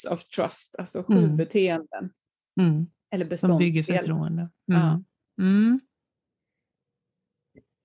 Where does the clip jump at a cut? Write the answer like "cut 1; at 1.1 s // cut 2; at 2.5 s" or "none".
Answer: none